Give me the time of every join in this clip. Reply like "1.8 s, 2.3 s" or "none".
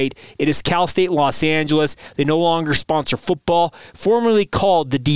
none